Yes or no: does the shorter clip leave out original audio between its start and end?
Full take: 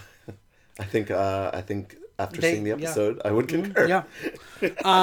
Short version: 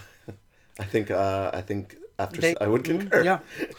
yes